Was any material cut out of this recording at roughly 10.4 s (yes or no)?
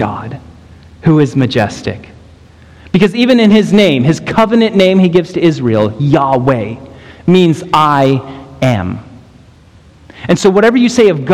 no